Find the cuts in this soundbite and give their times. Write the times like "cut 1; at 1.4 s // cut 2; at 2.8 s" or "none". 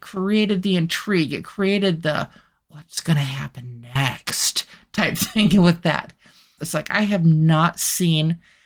cut 1; at 6.6 s